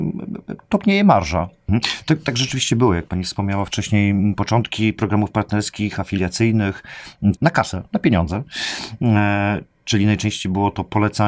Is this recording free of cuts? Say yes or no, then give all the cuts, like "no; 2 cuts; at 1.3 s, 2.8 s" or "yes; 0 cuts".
no; 2 cuts; at 1.7 s, 7.4 s